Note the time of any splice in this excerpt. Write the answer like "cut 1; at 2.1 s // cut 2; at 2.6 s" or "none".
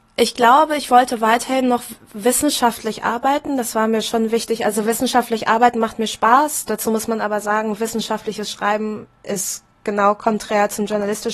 none

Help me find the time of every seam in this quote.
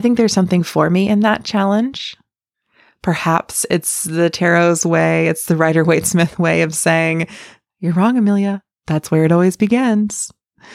none

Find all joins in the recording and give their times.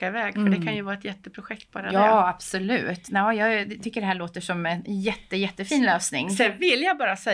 none

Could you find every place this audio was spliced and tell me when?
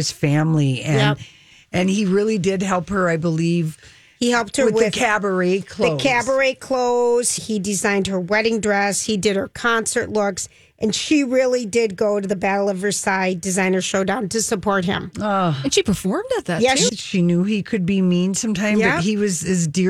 cut 1; at 7.4 s // cut 2; at 16.9 s

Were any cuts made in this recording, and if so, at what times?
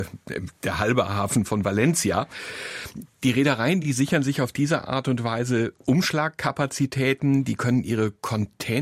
none

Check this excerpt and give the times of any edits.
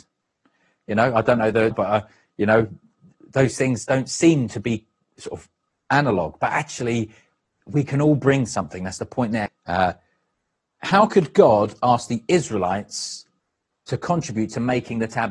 cut 1; at 1.7 s // cut 2; at 9.5 s

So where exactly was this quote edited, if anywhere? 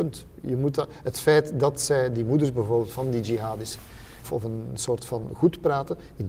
cut 1; at 4.2 s

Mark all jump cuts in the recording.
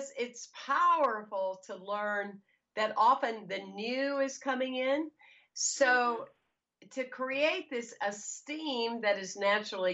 cut 1; at 5.5 s

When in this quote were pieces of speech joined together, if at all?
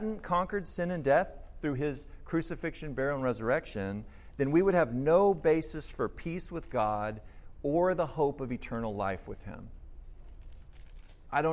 none

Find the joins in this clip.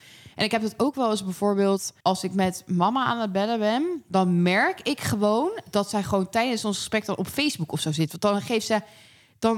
cut 1; at 2.0 s

